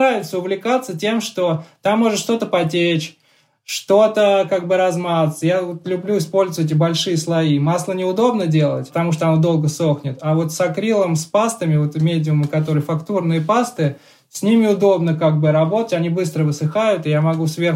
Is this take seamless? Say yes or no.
yes